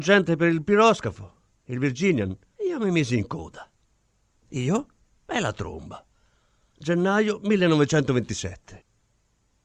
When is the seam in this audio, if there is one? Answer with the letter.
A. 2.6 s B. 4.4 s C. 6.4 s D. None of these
A